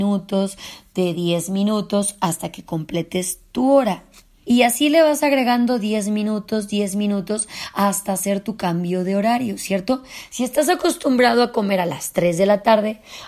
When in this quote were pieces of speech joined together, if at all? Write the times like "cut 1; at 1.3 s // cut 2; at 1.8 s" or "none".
cut 1; at 4.4 s